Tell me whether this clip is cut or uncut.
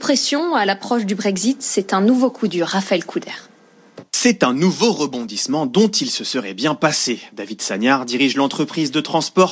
cut